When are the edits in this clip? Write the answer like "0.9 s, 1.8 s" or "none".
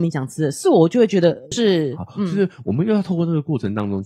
1.5 s